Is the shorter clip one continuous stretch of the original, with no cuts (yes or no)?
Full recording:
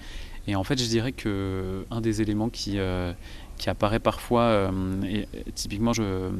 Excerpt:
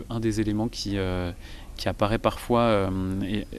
yes